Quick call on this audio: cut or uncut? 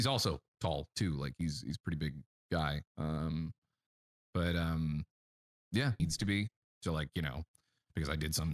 cut